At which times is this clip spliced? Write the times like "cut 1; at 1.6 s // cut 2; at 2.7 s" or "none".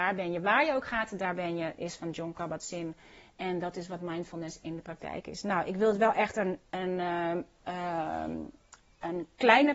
none